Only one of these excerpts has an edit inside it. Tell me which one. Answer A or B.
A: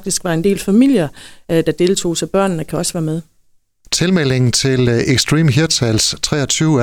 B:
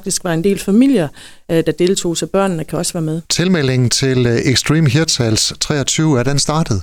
B